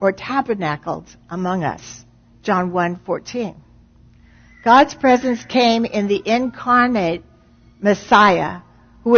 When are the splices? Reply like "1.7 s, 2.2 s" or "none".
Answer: none